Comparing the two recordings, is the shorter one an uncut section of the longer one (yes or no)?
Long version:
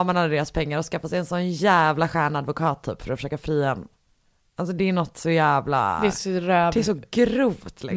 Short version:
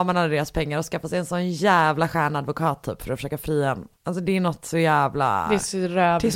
no